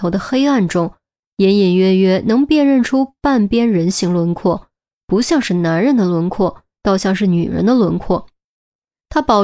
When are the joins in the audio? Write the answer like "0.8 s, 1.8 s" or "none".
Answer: none